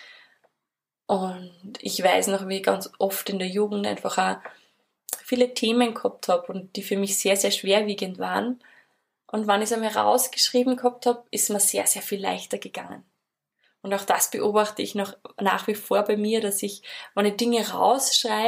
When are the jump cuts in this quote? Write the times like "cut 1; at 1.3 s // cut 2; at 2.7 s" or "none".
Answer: cut 1; at 1.0 s